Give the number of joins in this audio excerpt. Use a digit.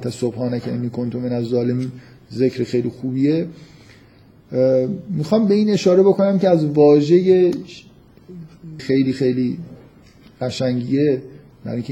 1